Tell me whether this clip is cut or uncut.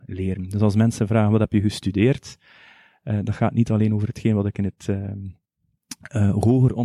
uncut